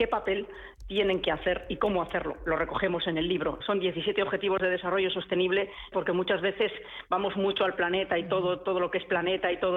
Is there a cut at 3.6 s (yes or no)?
yes